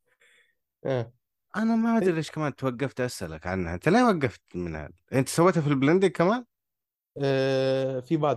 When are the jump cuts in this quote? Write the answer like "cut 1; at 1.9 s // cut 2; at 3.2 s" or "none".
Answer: none